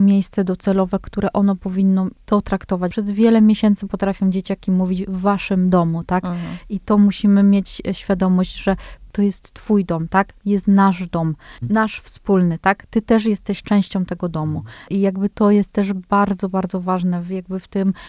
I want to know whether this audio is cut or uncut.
uncut